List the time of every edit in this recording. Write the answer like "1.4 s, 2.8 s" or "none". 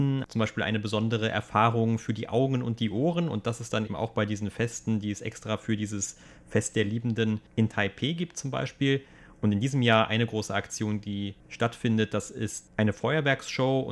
3.9 s